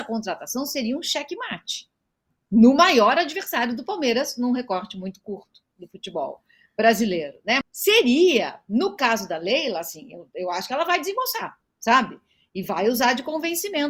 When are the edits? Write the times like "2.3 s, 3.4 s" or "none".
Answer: 7.6 s